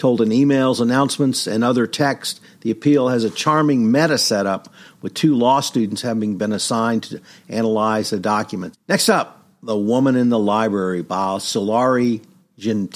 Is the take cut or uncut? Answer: cut